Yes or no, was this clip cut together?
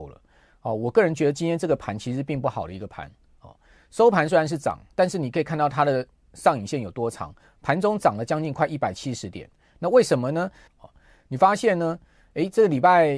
yes